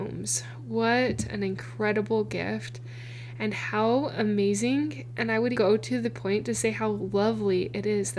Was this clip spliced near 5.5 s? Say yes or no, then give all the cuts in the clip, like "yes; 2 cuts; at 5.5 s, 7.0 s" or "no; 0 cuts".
yes; 1 cut; at 5.5 s